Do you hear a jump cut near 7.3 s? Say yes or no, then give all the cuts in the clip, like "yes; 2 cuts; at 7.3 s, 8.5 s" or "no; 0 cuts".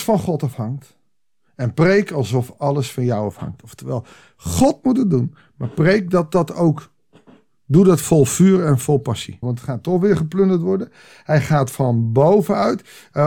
no; 1 cut; at 9.4 s